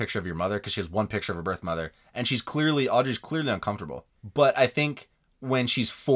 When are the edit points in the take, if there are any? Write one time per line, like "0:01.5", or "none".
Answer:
0:04.2

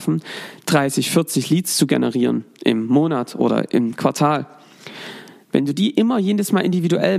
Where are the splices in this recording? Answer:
none

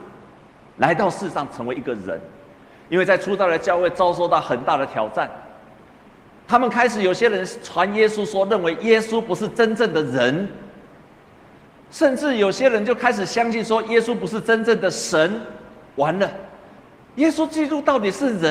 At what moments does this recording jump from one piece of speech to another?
none

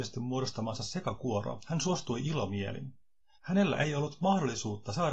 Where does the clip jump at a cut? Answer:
0:03.3

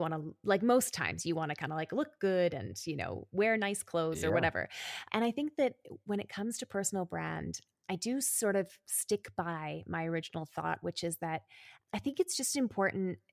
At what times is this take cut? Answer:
none

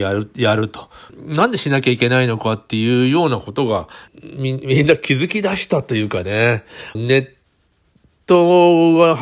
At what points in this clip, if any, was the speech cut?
0:06.9

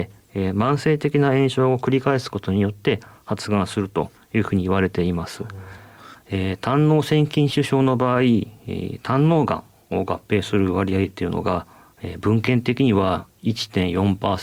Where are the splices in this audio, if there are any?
0:06.1

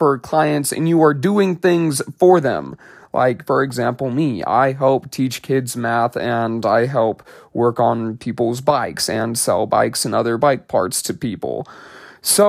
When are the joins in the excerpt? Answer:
none

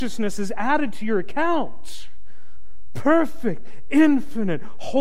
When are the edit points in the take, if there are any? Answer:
none

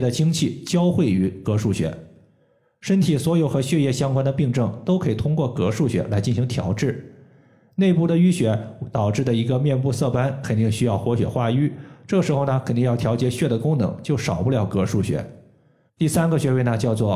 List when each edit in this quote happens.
0:15.9

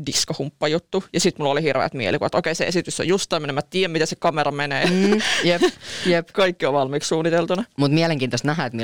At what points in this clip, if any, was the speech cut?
none

